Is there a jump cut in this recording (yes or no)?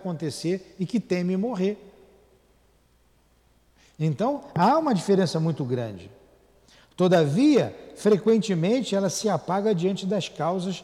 no